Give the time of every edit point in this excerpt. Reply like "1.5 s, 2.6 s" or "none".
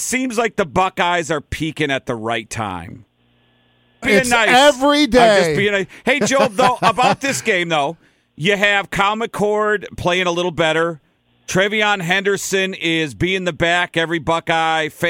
4.0 s